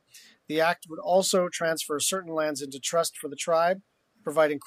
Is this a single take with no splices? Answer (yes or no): yes